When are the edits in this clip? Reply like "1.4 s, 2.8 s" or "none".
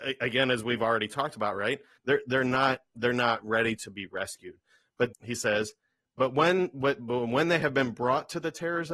2.0 s, 5.1 s